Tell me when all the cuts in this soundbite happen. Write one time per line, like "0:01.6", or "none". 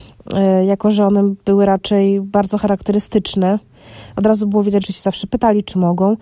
0:04.8